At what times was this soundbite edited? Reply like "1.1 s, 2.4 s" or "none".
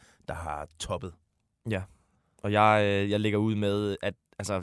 none